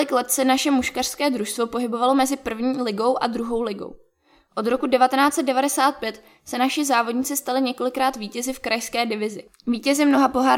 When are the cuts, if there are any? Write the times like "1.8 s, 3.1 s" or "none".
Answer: none

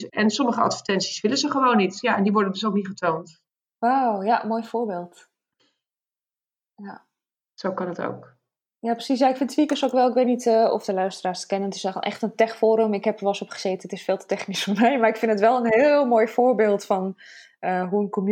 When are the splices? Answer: none

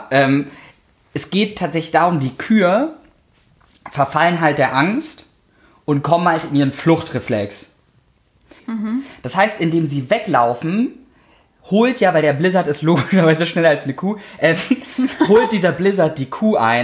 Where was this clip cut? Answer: 8.6 s

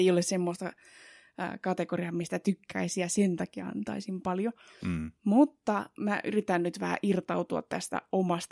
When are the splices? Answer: none

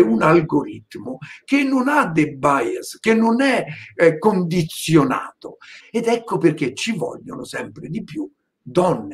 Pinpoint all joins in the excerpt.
5.8 s

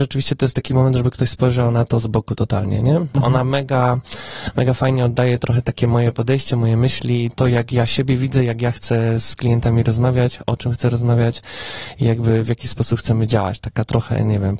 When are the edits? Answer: 3.1 s, 7.3 s

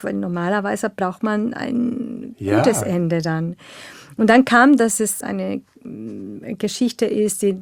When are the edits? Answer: 5.2 s

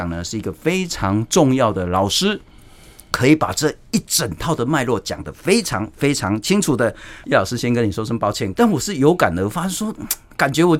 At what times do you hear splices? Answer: 7.2 s, 8.5 s

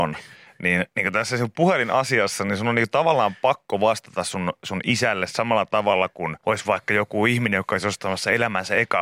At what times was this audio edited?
6.4 s

